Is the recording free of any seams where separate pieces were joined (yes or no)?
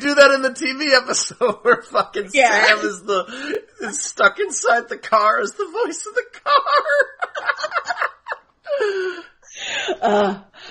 yes